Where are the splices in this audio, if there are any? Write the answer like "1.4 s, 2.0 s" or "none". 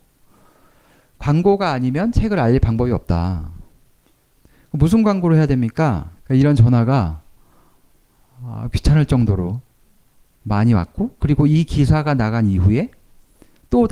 6.2 s